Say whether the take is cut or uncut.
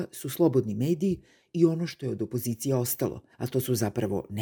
cut